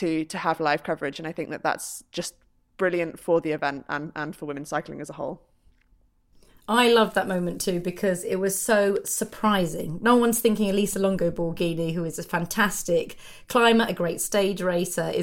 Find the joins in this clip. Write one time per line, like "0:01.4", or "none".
none